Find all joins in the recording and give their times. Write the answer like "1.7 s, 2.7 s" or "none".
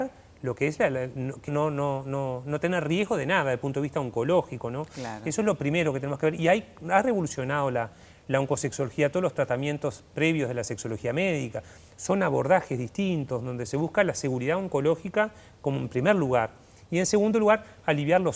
1.5 s